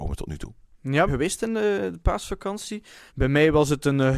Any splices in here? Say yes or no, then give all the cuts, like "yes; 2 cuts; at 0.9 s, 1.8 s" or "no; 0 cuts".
yes; 2 cuts; at 1.1 s, 3.1 s